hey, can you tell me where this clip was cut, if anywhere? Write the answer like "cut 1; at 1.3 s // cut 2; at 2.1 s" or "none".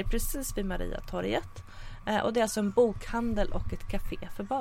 none